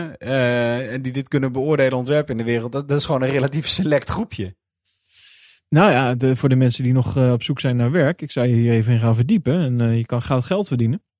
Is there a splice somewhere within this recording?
no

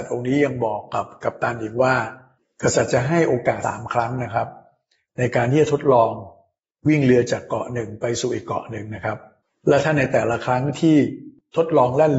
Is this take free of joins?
no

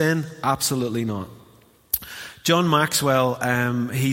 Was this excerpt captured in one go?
yes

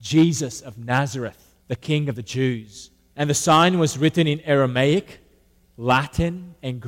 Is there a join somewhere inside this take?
yes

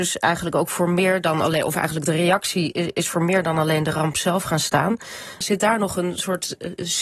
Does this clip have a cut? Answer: yes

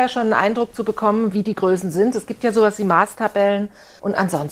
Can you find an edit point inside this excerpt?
no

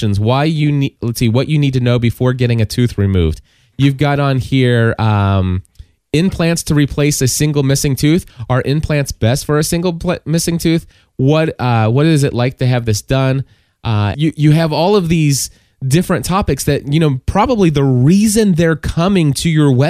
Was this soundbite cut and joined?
yes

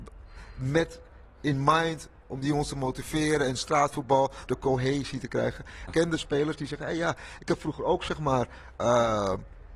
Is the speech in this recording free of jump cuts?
no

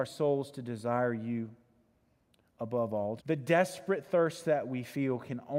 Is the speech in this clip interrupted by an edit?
yes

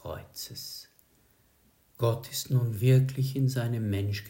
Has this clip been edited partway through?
no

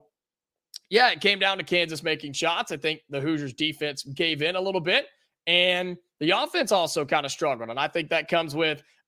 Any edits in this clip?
no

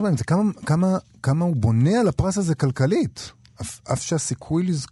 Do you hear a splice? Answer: no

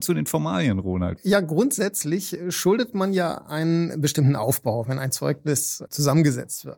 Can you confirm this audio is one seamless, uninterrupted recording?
no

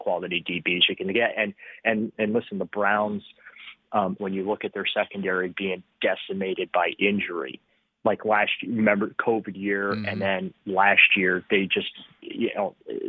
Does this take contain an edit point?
yes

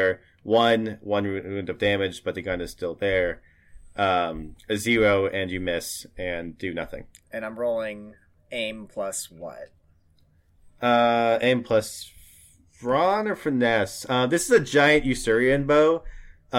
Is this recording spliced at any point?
no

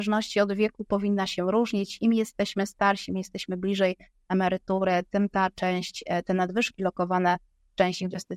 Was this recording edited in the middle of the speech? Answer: no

